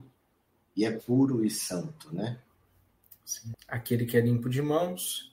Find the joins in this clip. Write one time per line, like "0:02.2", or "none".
0:03.5